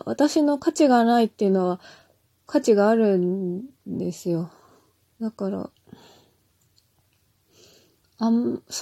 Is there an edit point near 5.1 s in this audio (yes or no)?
yes